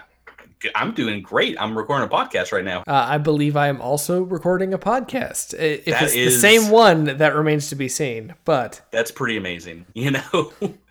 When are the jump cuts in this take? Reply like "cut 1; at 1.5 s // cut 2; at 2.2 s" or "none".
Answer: cut 1; at 2.8 s // cut 2; at 9.9 s